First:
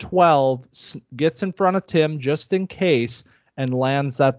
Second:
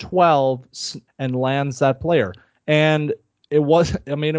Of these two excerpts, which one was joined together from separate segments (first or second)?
second